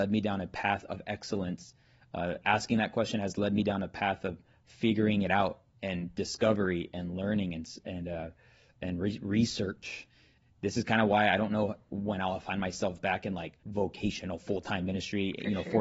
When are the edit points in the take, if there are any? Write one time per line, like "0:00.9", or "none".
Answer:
0:10.4
0:13.6